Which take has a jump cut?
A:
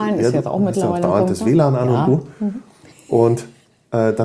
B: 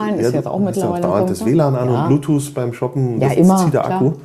A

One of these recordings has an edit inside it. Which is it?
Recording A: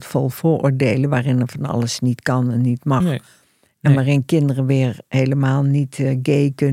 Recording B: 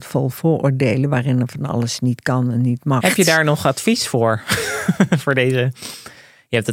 B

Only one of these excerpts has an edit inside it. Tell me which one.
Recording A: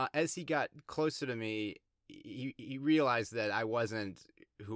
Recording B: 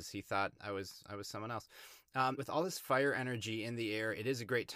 B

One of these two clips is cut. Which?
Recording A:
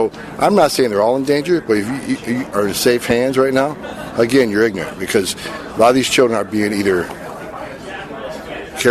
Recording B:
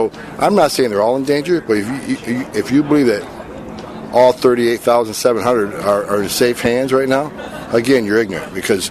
A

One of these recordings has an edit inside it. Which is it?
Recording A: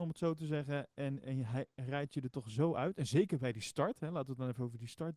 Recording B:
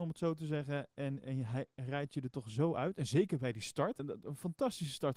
B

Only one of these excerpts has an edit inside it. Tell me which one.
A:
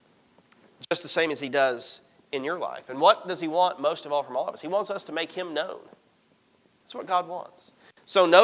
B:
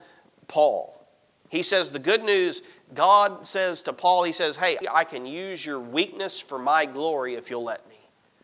B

